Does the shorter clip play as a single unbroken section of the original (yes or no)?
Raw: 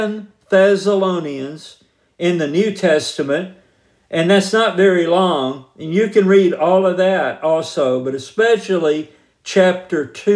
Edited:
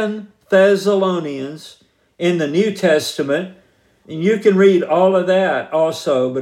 no